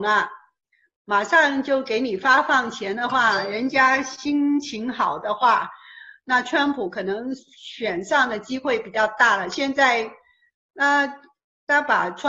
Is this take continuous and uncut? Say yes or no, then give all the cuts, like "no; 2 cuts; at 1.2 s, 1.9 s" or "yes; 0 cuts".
yes; 0 cuts